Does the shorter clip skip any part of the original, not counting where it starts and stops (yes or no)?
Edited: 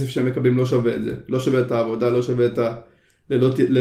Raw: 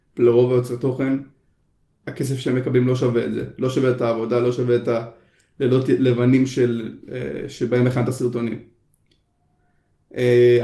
no